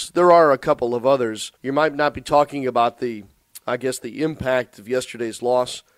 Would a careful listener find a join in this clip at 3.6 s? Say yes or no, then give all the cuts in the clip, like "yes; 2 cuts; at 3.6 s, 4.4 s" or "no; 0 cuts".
no; 1 cut; at 1.6 s